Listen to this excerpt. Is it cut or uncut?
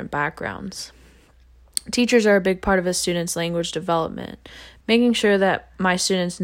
cut